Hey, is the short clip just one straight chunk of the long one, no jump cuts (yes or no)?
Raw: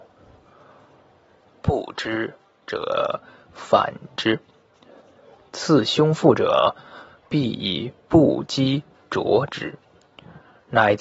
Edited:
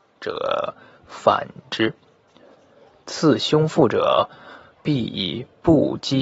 yes